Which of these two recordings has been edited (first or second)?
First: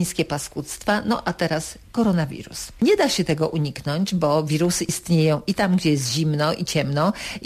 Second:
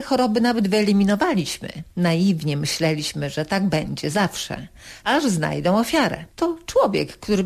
second